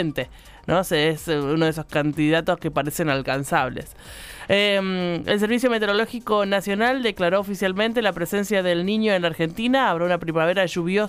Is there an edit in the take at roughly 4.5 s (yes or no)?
no